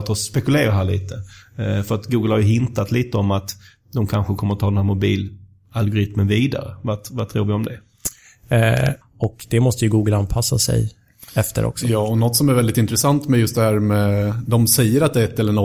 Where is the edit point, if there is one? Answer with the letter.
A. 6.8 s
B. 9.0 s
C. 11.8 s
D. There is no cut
B